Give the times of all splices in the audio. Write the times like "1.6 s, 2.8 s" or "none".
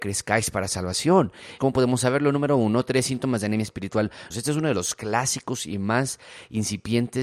1.6 s, 4.3 s